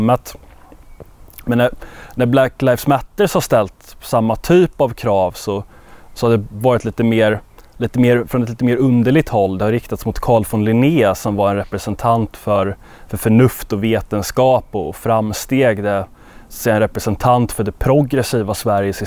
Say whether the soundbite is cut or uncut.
uncut